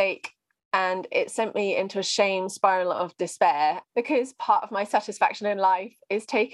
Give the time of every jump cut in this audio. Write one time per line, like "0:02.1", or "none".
0:03.9